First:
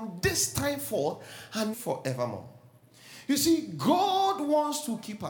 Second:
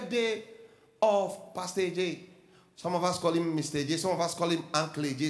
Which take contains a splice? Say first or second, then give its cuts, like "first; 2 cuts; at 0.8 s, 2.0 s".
first; 1 cut; at 1.7 s